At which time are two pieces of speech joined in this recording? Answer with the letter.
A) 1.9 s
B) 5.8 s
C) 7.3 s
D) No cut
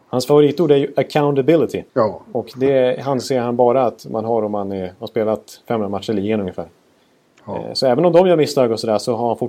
A